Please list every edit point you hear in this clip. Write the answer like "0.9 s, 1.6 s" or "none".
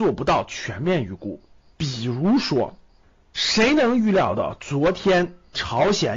none